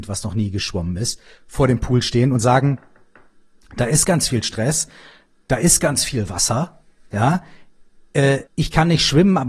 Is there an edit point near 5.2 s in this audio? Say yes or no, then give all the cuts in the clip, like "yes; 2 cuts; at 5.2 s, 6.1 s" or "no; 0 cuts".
no; 1 cut; at 8.5 s